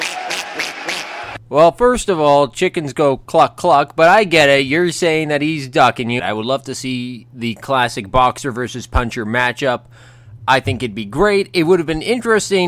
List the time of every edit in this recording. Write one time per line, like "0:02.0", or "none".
0:06.2